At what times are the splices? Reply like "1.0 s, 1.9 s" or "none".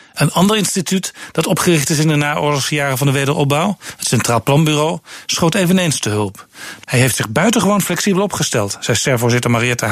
6.8 s